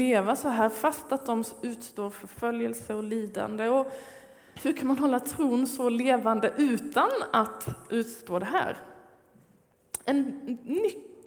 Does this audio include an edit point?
yes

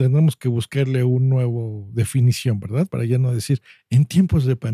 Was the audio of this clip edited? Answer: no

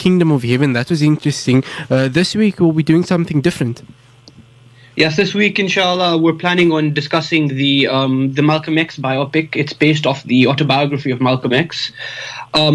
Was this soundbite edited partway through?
no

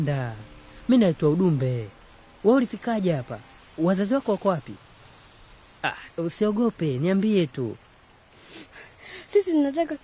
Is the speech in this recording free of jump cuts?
yes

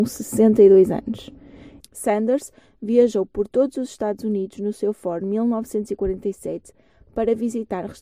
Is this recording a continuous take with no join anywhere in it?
no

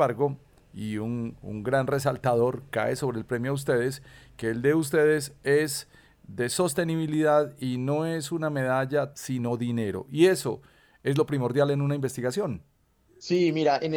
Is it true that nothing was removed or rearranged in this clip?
no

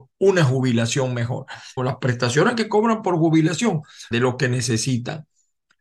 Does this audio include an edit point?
yes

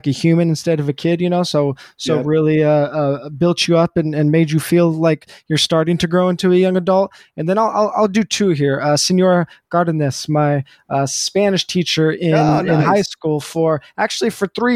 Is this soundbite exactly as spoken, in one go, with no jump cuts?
yes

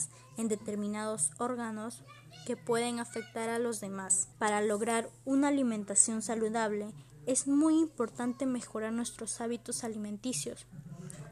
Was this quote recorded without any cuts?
no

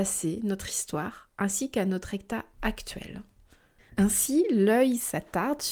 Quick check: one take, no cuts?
yes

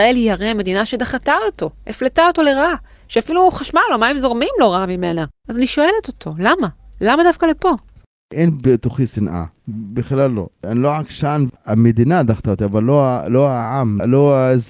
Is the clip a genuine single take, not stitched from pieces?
no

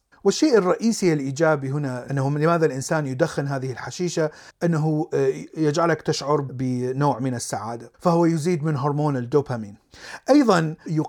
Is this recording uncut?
yes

